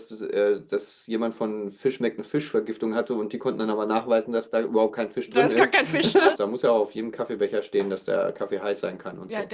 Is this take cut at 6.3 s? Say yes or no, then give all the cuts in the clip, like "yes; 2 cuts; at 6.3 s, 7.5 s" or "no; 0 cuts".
yes; 1 cut; at 6.3 s